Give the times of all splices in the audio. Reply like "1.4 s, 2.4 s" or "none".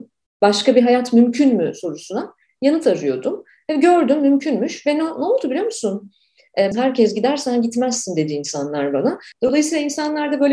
6.7 s, 9.3 s